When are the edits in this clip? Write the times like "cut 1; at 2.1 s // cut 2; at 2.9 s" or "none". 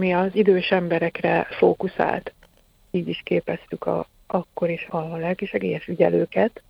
cut 1; at 4.9 s